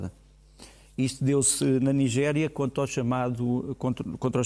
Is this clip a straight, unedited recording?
yes; 0 cuts

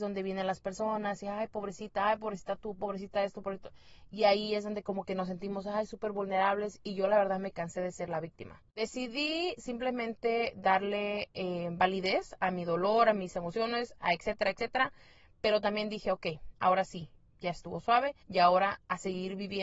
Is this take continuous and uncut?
no; 2 cuts; at 16.5 s, 18.2 s

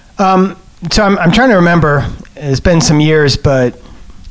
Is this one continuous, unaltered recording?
yes; 0 cuts

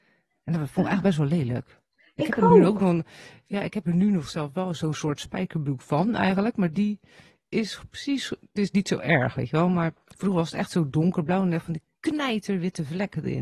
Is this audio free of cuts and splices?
yes; 0 cuts

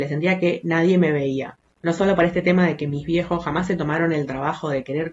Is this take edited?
no; 0 cuts

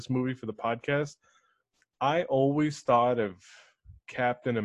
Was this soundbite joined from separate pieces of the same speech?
no; 0 cuts

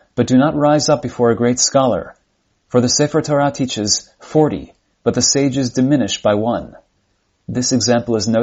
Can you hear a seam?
no; 0 cuts

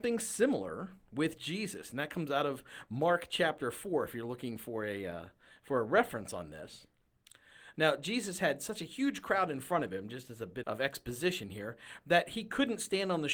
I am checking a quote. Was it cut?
yes; 2 cuts; at 7.7 s, 10.6 s

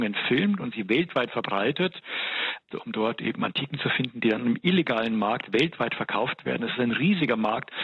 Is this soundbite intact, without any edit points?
no; 1 cut; at 2.7 s

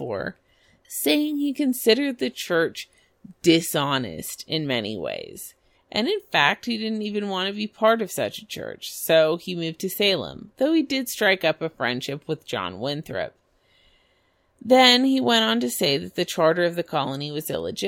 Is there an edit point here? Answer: yes; 1 cut; at 5.7 s

